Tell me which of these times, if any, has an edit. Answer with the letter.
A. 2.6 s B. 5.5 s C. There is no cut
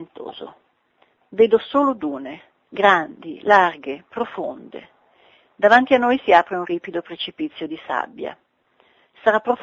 A